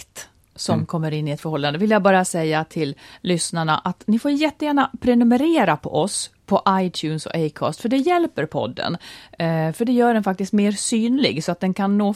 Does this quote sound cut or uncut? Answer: uncut